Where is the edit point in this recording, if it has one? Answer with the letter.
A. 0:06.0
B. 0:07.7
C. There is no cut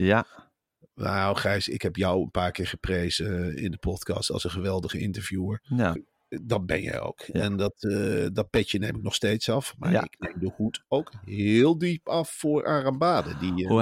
A